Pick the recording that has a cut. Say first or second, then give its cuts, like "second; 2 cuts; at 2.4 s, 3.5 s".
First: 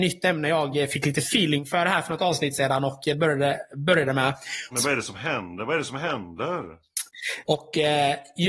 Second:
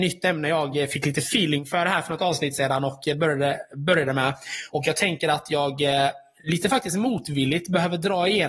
first; 2 cuts; at 4.7 s, 7.4 s